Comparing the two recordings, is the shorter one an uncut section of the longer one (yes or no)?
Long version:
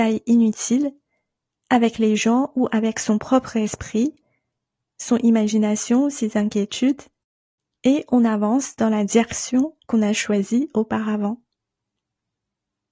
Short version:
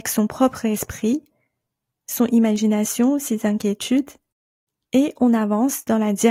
yes